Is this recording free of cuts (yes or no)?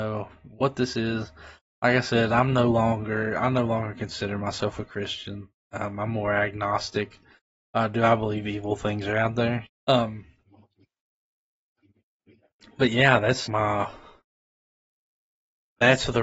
no